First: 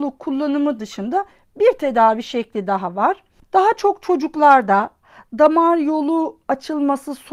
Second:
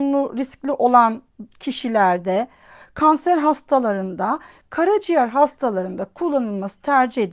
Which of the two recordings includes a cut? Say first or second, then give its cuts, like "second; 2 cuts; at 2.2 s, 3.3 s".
first; 1 cut; at 3.4 s